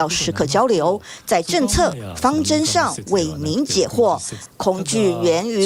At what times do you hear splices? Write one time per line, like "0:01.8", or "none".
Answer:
0:04.5